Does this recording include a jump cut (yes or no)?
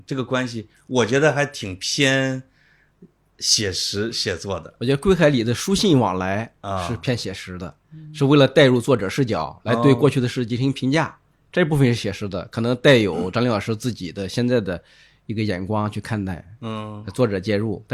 no